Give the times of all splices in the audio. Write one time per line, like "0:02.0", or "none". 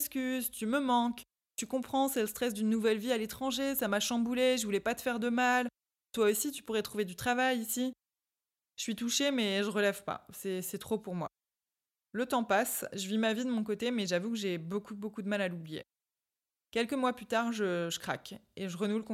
none